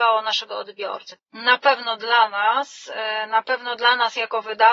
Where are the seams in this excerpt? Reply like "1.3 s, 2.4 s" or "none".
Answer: 1.2 s